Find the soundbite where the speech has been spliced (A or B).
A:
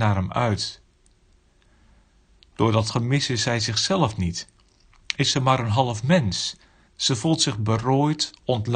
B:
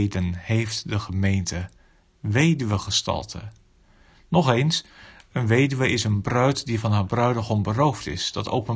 A